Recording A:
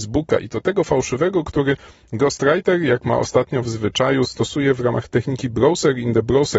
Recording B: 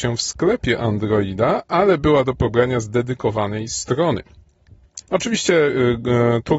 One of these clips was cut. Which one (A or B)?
B